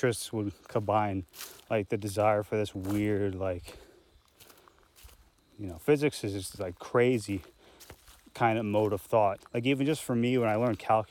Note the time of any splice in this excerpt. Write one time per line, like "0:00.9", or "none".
0:09.4